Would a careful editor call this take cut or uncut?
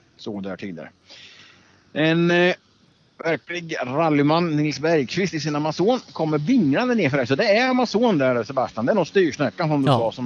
uncut